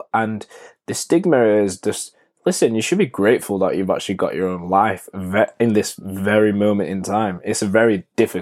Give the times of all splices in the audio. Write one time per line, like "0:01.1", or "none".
none